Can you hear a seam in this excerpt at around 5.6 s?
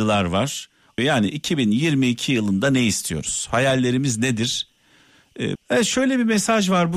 yes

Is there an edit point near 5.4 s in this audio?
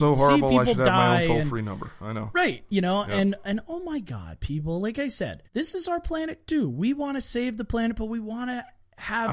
yes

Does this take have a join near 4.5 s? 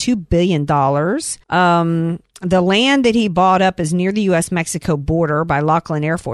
no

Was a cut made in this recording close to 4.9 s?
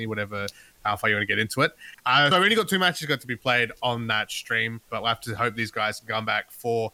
yes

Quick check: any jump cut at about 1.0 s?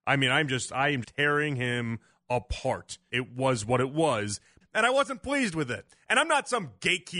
yes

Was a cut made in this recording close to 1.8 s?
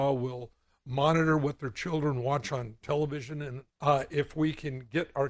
no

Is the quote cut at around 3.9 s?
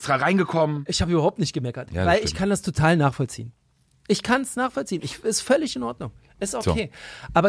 no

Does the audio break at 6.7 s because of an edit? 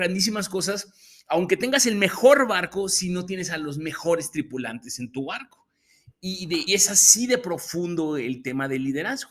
yes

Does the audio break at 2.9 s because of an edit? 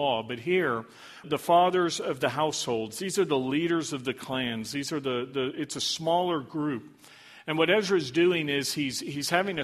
no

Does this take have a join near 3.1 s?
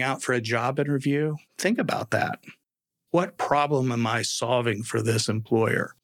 yes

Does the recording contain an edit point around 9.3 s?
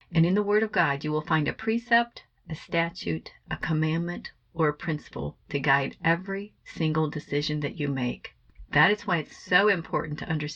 no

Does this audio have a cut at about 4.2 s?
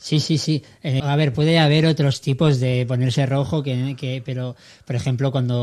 no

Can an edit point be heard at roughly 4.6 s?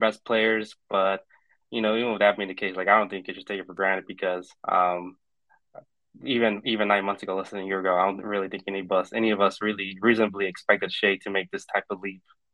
yes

